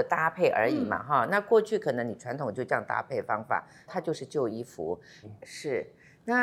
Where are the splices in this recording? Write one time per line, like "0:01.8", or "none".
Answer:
0:03.9
0:05.2